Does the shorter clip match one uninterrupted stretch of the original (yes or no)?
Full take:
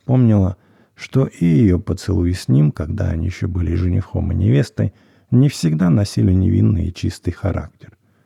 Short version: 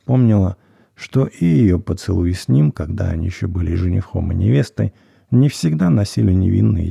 yes